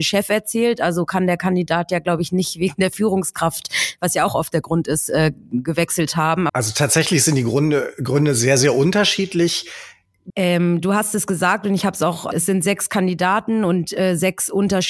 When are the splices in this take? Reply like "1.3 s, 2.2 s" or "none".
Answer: 6.5 s, 10.3 s, 12.3 s